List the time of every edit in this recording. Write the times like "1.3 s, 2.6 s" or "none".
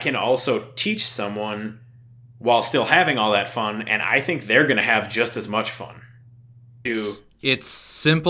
6.8 s